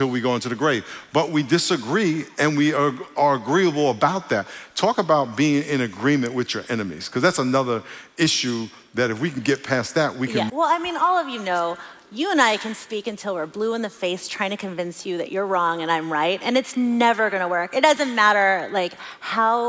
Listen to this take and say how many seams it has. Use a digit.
1